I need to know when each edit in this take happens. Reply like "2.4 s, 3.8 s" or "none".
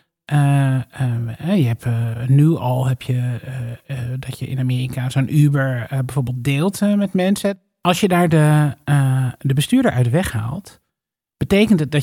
none